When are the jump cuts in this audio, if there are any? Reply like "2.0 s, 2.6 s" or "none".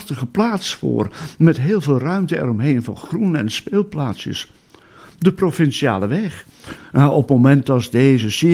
6.8 s